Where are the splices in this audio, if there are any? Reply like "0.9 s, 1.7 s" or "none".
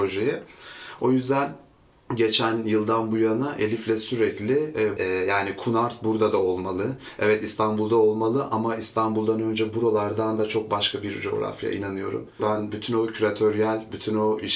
5.0 s, 12.4 s